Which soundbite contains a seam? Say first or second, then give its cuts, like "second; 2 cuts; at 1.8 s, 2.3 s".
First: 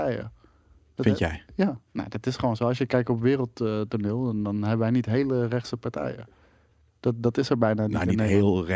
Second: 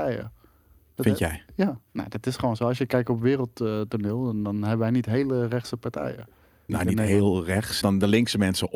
second; 2 cuts; at 6.7 s, 7.8 s